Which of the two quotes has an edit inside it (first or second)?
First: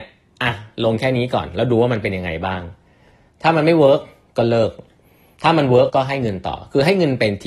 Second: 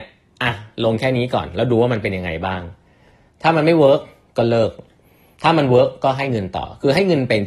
first